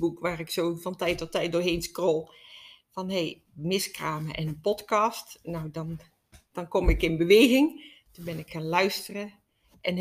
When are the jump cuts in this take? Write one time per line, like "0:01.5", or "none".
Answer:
0:08.1